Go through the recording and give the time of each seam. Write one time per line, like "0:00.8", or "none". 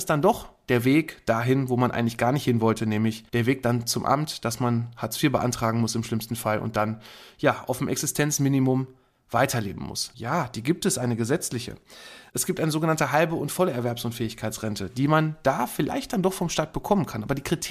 0:03.3
0:10.1